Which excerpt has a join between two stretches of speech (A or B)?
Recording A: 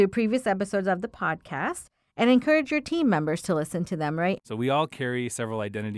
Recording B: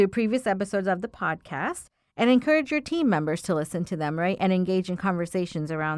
A